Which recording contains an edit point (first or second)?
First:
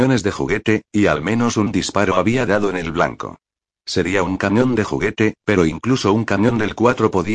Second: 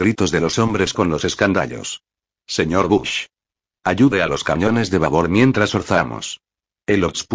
first